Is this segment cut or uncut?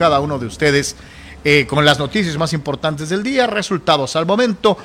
uncut